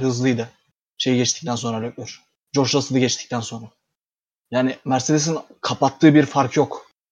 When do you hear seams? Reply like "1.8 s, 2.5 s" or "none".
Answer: none